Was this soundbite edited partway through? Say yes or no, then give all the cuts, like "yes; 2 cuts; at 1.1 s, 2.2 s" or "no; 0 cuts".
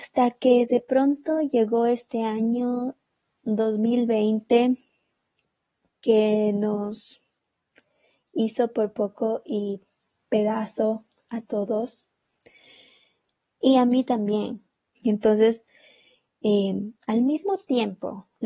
yes; 1 cut; at 14.9 s